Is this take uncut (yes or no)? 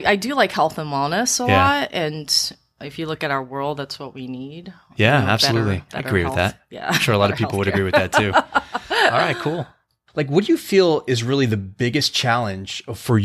yes